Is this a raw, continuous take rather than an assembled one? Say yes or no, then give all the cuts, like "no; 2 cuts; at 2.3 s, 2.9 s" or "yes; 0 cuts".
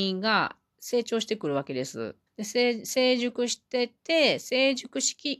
no; 2 cuts; at 2.3 s, 4.0 s